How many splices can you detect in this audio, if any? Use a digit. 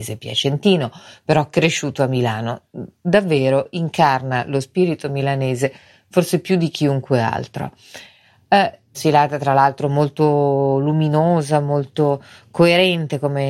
1